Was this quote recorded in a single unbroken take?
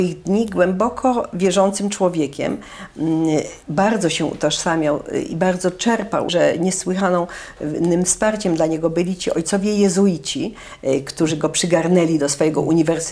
no; 2 cuts; at 3.6 s, 6.3 s

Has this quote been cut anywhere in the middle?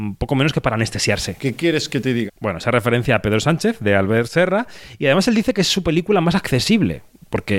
yes; 1 cut; at 2.3 s

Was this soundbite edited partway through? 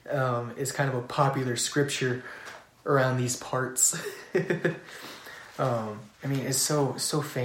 yes; 1 cut; at 6.1 s

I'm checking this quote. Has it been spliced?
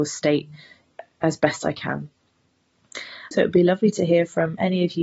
yes; 1 cut; at 3.3 s

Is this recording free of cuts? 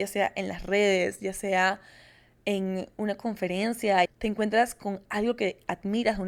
no; 1 cut; at 4.1 s

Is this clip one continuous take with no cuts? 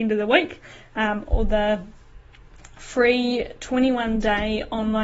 yes; 0 cuts

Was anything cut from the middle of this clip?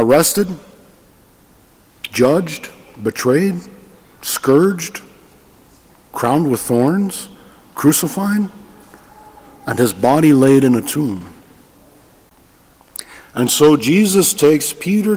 no; 0 cuts

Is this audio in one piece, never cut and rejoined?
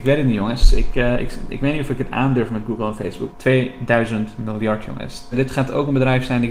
no; 2 cuts; at 3.3 s, 5.3 s

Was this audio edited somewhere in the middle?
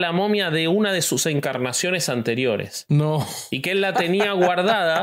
no; 0 cuts

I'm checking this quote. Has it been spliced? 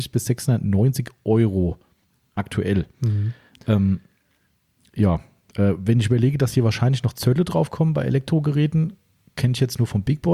no; 0 cuts

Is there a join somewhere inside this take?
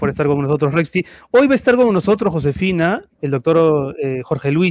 yes; 1 cut; at 3.2 s

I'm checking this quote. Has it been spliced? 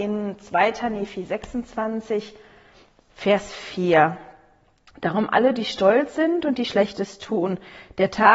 no; 0 cuts

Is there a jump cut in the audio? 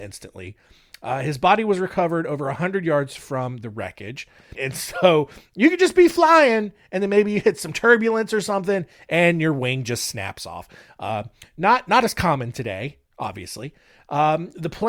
yes; 1 cut; at 4.5 s

